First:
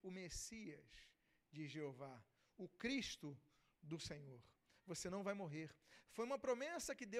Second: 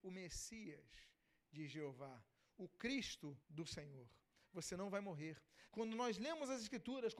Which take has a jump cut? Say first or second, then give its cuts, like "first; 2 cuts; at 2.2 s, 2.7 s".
second; 2 cuts; at 3.4 s, 5.7 s